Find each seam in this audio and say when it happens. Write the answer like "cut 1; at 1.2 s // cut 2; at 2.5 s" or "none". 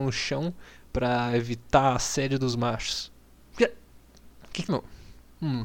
cut 1; at 3.4 s // cut 2; at 4.7 s

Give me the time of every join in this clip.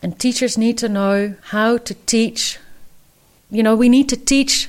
cut 1; at 1.4 s

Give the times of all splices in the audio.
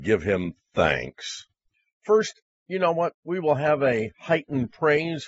none

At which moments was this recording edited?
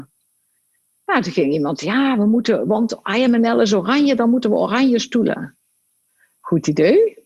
none

